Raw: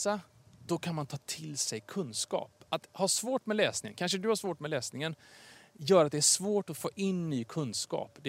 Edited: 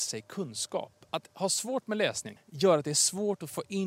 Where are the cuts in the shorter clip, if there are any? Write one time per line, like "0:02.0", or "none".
0:02.4